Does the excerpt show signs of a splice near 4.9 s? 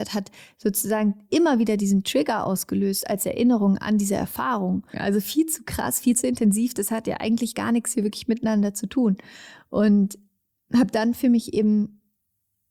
yes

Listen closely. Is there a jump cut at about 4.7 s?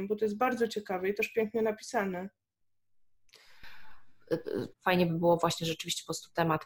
yes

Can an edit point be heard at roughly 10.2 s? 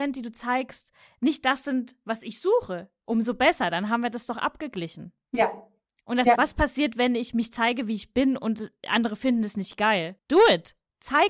yes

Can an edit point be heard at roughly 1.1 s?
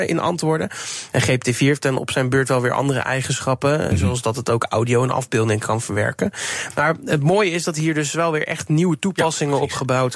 yes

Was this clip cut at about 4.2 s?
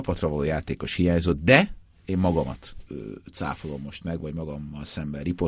no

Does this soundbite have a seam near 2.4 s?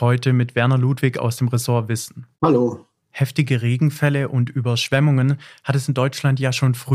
yes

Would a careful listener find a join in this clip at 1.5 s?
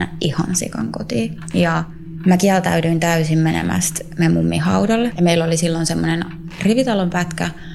no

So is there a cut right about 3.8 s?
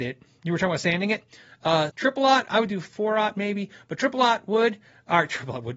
no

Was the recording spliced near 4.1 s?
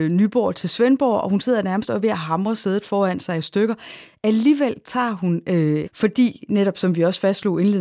no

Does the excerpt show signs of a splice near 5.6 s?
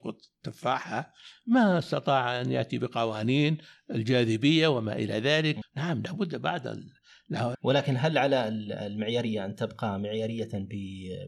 yes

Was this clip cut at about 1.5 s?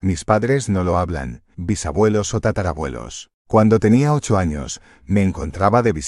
yes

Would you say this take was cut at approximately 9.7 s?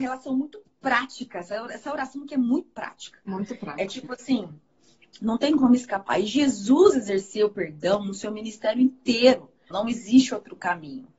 yes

